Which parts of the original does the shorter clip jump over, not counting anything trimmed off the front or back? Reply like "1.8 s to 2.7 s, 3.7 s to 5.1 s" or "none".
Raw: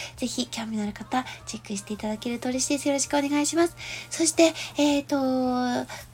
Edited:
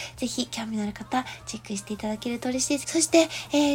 2.8 s to 4.1 s